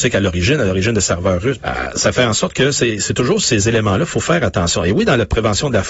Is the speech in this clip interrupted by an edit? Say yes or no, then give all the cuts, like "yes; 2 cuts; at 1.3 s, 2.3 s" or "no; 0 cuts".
yes; 1 cut; at 1.6 s